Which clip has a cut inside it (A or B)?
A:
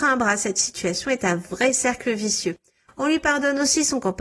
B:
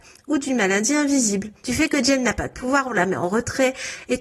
B